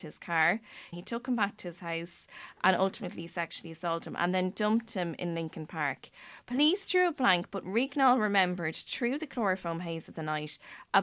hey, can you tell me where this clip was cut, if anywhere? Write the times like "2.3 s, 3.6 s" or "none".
0.9 s